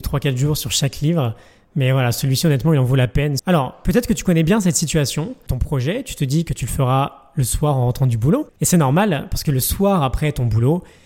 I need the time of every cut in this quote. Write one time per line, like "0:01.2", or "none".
0:03.4
0:05.5
0:08.5